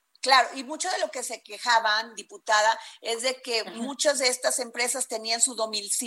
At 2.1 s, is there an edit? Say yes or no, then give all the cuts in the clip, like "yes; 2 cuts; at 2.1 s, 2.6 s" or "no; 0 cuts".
no; 0 cuts